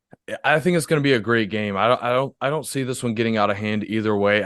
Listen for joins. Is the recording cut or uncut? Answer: uncut